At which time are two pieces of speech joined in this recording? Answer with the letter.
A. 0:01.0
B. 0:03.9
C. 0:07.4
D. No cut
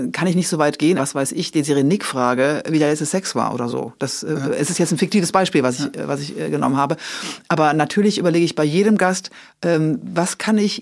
A